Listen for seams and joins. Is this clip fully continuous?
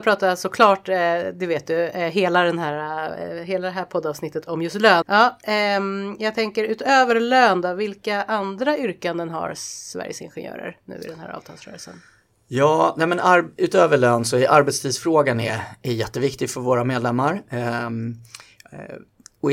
no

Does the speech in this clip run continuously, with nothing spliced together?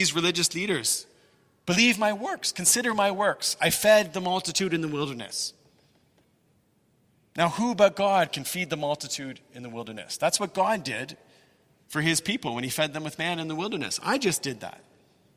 yes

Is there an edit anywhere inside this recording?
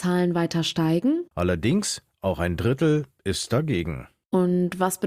yes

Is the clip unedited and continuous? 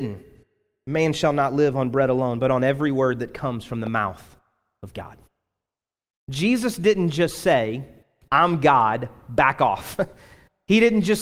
yes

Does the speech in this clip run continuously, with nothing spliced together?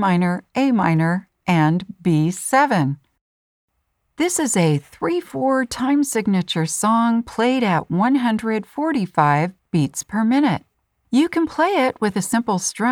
yes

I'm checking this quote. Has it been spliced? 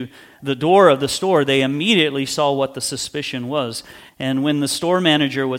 yes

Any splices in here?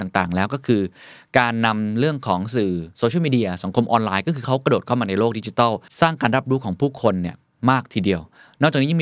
no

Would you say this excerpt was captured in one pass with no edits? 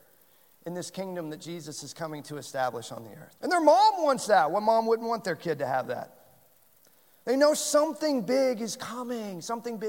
no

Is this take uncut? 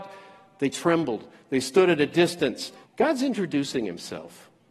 no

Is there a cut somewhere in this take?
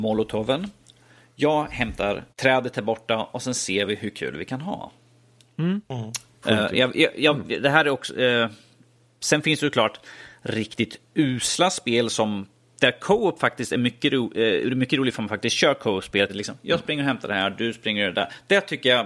yes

